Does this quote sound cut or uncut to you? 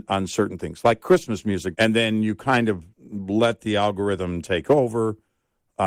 cut